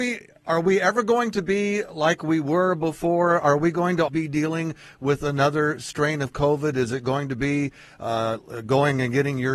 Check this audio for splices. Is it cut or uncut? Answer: cut